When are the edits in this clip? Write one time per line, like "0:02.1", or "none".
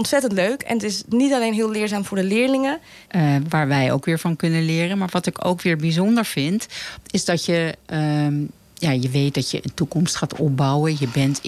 0:03.1